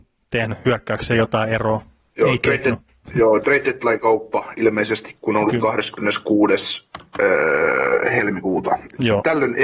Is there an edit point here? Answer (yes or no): no